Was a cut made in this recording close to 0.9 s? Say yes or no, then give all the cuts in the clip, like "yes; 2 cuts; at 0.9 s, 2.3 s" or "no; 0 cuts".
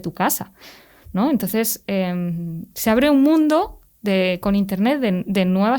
no; 0 cuts